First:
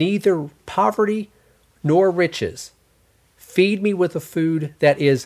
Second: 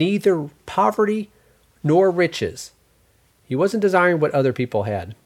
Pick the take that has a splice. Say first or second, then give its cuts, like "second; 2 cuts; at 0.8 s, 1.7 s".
second; 1 cut; at 3.3 s